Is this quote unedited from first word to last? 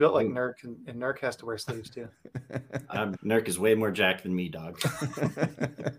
no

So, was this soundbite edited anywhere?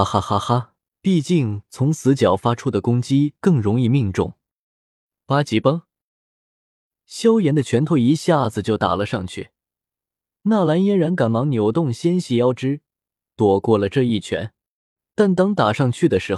yes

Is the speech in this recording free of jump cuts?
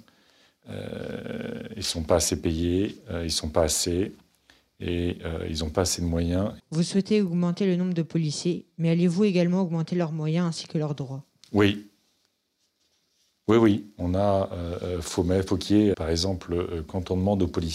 no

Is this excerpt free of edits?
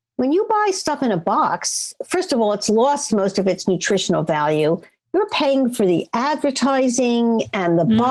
yes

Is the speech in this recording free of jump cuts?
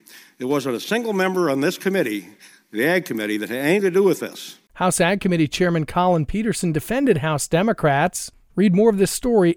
no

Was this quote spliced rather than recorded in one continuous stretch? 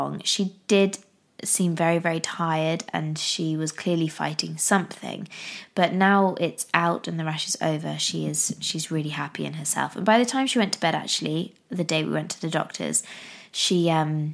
no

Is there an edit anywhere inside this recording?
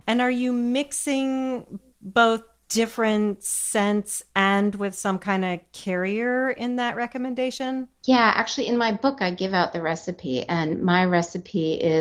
no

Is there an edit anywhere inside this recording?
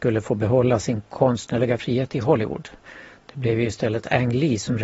no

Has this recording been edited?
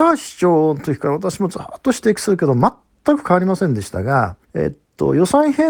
yes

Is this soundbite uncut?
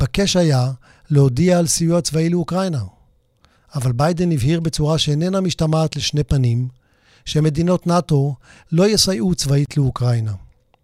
yes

